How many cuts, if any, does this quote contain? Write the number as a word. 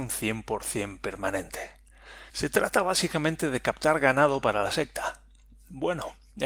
one